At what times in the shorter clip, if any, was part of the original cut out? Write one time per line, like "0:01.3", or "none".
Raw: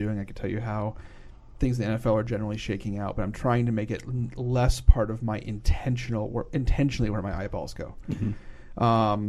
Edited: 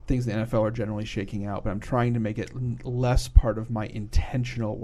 none